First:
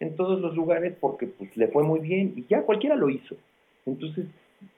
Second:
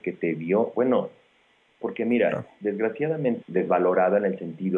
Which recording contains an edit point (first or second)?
second